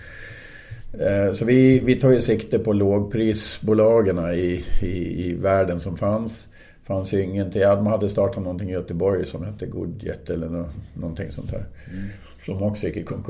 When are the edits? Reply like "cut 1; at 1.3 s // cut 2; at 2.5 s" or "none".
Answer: none